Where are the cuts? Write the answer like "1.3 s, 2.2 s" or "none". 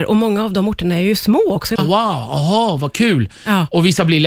1.8 s